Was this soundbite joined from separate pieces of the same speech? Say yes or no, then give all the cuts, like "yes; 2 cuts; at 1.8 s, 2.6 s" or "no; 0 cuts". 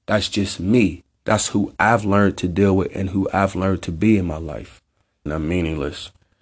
yes; 1 cut; at 5.3 s